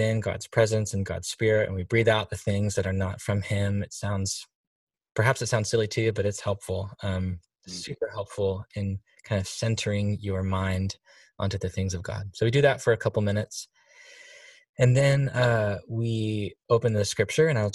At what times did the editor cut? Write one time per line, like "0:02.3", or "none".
none